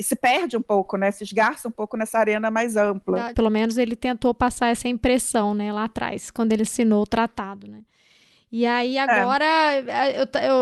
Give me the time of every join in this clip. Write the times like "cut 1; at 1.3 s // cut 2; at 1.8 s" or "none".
cut 1; at 3.3 s